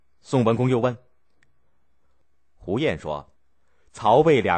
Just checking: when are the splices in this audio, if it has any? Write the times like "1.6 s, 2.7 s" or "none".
3.4 s

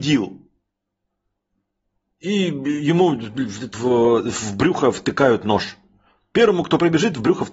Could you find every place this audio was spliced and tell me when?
3.7 s

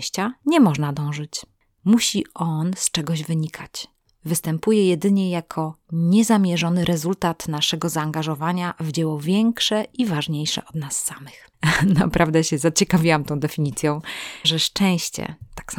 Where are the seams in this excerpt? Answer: 11.5 s, 14.4 s

